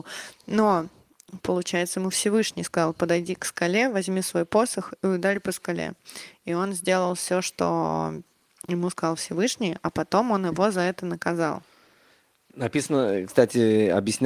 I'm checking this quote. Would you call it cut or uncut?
uncut